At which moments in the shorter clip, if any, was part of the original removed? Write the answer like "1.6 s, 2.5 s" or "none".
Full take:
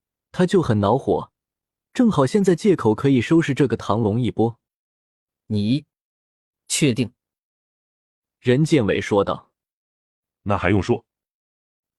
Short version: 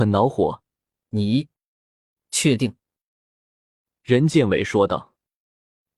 1.0 s